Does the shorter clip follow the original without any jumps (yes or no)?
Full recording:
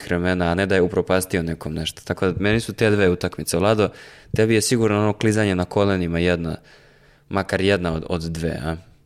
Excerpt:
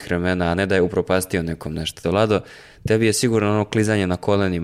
no